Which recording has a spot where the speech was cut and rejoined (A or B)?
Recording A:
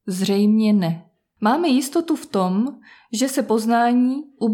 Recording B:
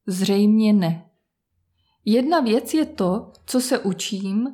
A